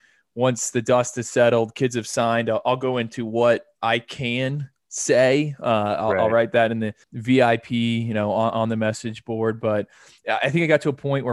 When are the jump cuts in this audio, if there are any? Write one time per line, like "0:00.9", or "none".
0:07.0